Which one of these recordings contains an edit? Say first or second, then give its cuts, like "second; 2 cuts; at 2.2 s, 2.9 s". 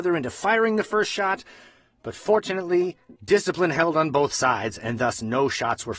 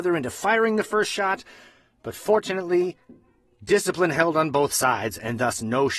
first; 1 cut; at 3.2 s